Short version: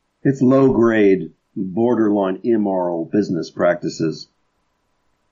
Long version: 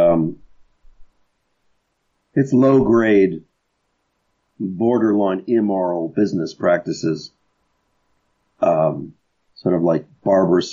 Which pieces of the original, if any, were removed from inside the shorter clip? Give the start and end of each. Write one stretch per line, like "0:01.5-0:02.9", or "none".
0:03.5-0:04.5